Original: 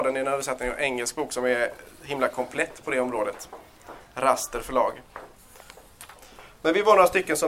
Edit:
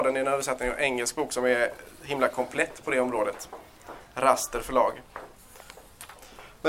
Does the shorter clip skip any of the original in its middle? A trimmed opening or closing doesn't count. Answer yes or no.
no